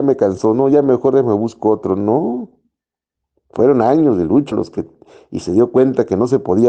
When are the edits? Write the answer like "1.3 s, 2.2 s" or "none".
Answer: 4.5 s